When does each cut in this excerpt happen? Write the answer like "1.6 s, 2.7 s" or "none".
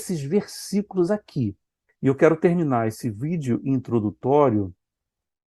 1.9 s